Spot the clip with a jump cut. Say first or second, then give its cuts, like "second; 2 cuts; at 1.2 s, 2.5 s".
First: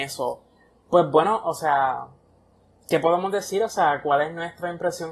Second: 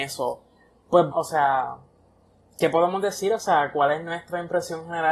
second; 1 cut; at 1.1 s